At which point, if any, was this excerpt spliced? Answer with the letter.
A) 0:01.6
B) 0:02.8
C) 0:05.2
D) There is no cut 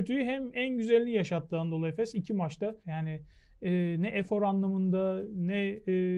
B